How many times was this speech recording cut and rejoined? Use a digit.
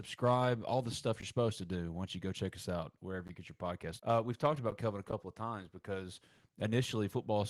1